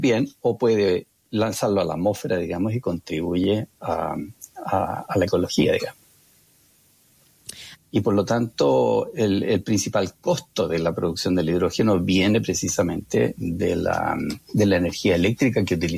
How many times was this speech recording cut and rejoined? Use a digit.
1